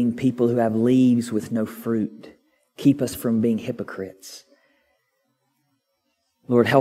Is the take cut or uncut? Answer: uncut